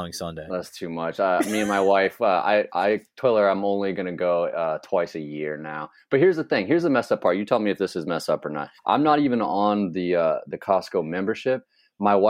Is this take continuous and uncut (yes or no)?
no